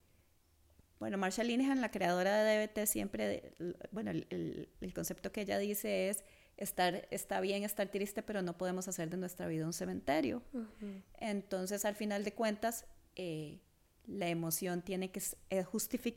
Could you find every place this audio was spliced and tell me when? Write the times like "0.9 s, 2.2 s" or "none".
none